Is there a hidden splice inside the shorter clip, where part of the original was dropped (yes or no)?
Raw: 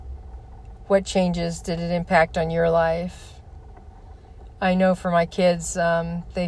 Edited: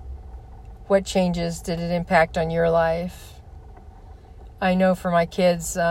no